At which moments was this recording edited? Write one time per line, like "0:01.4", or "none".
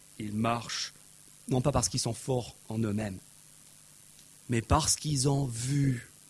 none